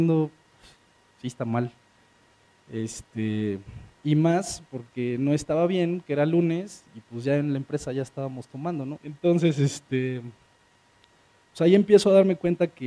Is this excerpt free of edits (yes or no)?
no